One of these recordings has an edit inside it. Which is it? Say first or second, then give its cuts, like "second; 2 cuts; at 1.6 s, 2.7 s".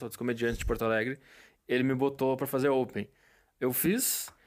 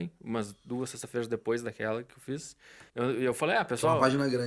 second; 1 cut; at 2.9 s